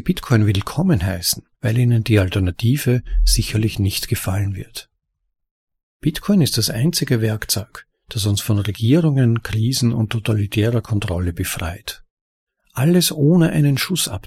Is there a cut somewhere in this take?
yes; 2 cuts; at 1.5 s, 6.0 s

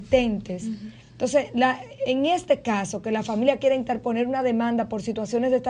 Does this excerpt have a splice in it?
no; 0 cuts

